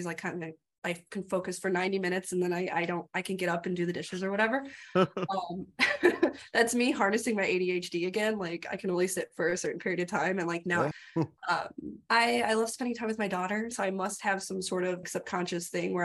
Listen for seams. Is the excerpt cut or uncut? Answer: cut